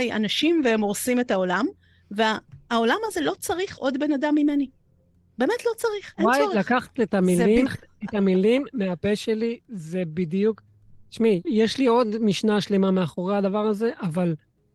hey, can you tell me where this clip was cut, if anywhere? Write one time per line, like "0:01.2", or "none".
0:07.7
0:11.4